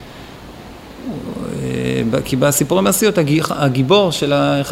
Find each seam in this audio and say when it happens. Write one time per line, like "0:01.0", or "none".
none